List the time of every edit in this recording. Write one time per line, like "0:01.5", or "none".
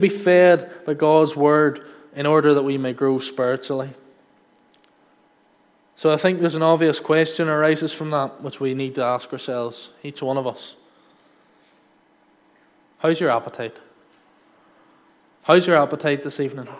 none